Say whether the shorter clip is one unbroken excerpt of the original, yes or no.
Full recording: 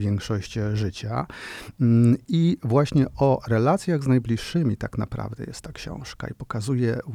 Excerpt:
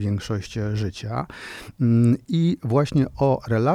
yes